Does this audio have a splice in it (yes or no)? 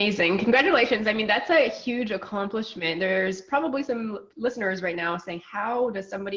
no